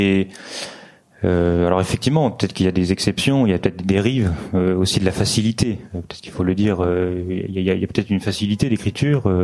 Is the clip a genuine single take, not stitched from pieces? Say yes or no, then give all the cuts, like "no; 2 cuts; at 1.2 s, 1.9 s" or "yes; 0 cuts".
yes; 0 cuts